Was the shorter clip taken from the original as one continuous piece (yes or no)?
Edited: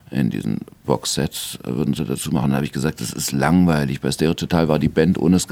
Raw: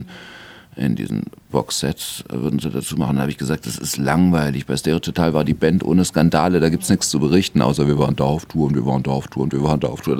yes